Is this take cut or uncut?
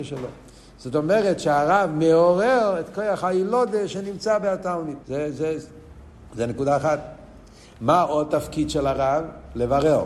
cut